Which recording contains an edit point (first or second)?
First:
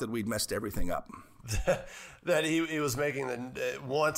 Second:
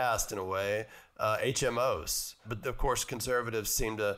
second